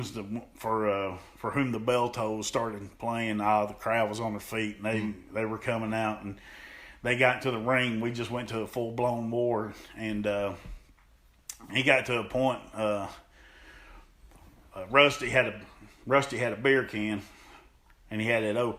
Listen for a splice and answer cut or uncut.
uncut